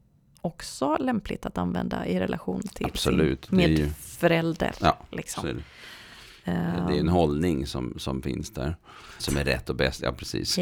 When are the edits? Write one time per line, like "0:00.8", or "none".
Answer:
0:09.2